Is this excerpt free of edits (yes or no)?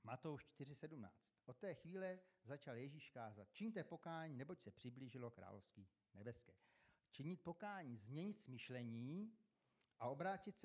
yes